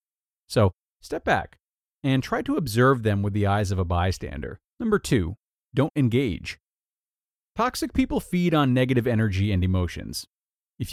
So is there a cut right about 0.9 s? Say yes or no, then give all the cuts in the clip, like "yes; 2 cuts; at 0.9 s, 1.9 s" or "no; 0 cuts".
yes; 2 cuts; at 0.9 s, 4.7 s